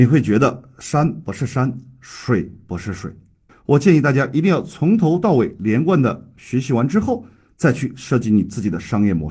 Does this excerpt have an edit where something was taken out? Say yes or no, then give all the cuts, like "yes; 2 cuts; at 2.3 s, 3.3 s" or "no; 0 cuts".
yes; 1 cut; at 3.5 s